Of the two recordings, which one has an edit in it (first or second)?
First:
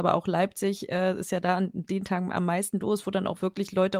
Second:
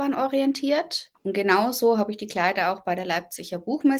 second